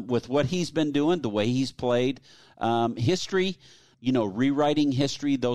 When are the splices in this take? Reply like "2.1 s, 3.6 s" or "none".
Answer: 3.9 s